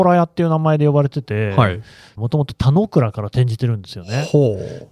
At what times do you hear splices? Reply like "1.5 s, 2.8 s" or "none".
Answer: 2.2 s